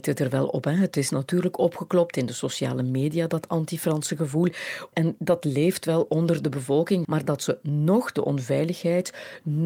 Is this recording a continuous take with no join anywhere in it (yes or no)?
no